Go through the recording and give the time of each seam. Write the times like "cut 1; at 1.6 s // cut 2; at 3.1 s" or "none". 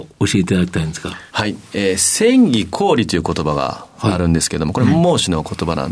cut 1; at 1.3 s